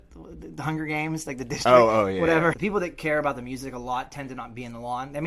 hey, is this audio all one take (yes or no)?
no